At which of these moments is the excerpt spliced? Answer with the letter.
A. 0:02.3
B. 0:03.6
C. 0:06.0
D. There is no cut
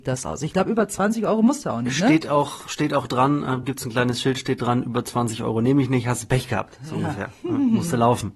D